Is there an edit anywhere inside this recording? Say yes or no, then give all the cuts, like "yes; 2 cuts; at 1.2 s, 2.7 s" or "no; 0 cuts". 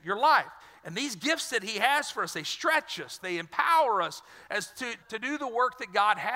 yes; 2 cuts; at 3.2 s, 5.0 s